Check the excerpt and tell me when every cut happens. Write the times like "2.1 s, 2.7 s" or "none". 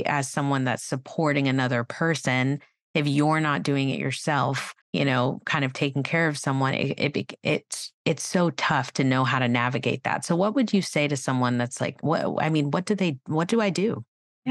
4.8 s